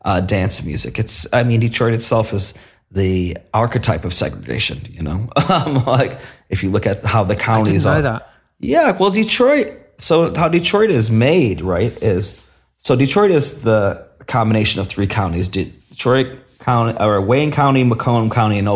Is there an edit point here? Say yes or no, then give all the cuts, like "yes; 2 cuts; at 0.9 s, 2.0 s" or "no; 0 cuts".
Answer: no; 0 cuts